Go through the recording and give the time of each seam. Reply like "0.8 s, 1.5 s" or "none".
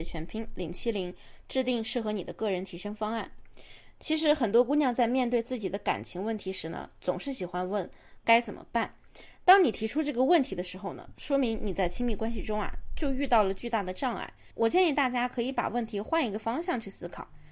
none